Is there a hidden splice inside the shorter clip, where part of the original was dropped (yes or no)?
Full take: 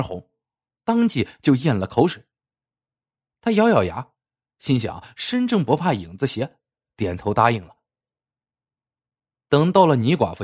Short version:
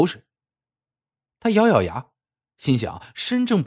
no